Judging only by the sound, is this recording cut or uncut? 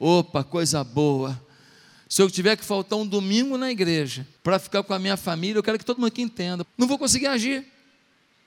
cut